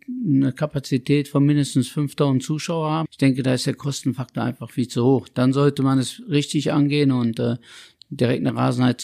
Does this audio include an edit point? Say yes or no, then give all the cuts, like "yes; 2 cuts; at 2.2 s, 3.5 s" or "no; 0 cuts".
yes; 1 cut; at 3.0 s